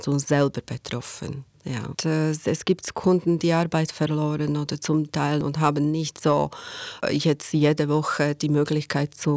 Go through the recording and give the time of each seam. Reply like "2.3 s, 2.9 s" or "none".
1.9 s